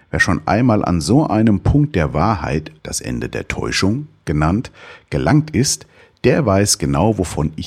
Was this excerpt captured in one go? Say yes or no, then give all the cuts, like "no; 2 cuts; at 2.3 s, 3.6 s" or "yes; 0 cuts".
no; 1 cut; at 2.8 s